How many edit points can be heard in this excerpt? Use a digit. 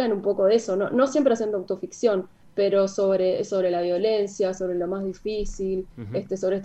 0